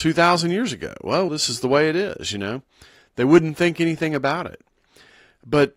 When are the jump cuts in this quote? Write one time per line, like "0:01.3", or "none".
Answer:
0:01.3